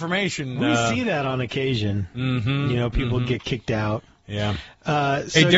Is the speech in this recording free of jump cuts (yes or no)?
yes